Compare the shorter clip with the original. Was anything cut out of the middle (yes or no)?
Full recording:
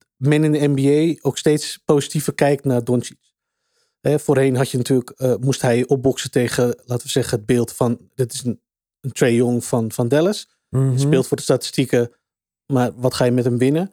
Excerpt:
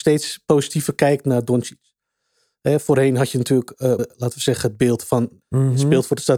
yes